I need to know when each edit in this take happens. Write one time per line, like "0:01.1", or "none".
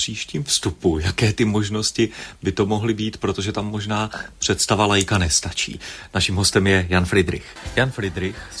none